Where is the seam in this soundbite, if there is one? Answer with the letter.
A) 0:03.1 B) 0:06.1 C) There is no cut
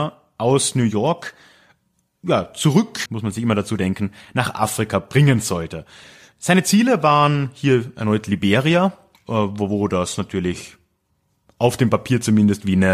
A